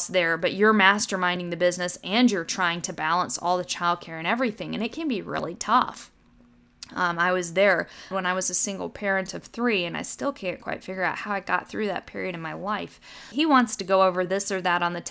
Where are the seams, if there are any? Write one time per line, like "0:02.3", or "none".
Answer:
0:08.1
0:13.3

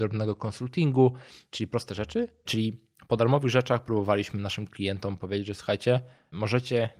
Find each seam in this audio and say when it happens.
0:02.4

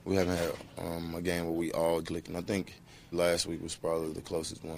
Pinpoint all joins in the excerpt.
0:02.0
0:03.1

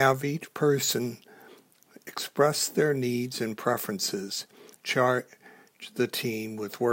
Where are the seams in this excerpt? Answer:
0:04.7

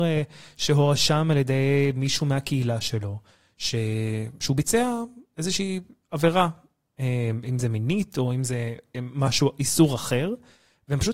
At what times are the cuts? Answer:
none

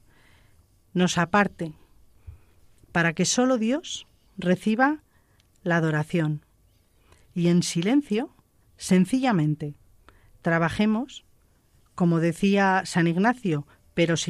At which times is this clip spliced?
none

